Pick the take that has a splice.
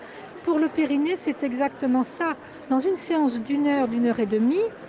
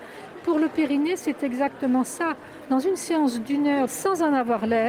second; 1 cut; at 3.9 s

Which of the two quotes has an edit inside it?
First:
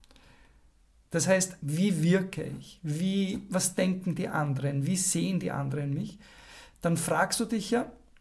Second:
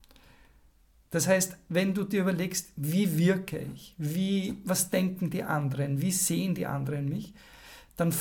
first; 1 cut; at 1.6 s

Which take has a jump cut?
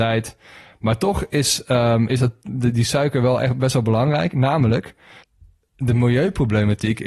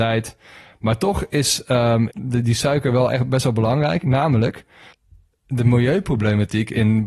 second; 1 cut; at 2.1 s

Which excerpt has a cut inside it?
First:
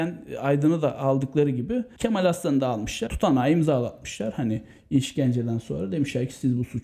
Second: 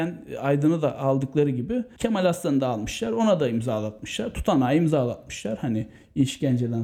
first; 1 cut; at 3.1 s

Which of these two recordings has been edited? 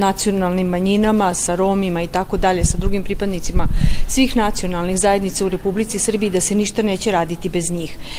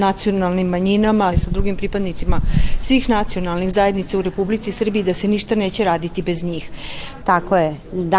second; 2 cuts; at 1.3 s, 7.2 s

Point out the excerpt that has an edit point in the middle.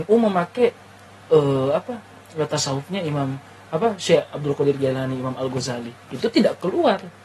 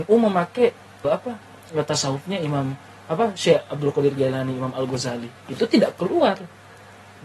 second; 1 cut; at 1.0 s

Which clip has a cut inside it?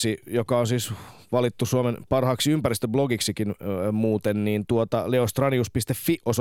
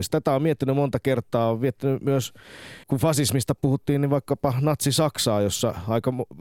second; 1 cut; at 2.8 s

